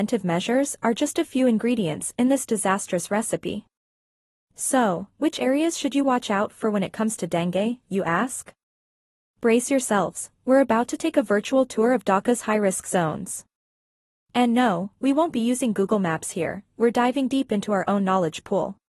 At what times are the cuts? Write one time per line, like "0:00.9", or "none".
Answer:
none